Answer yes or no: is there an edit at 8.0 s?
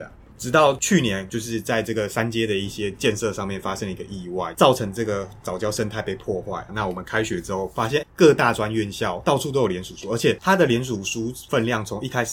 yes